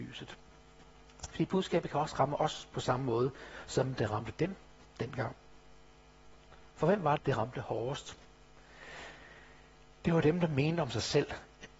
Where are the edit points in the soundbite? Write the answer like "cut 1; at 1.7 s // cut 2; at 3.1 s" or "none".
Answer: cut 1; at 7.2 s